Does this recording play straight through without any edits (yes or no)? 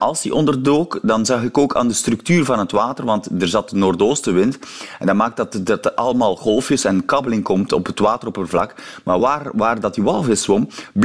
yes